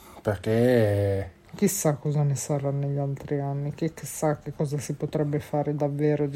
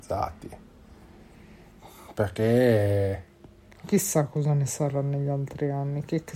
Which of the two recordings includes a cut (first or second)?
first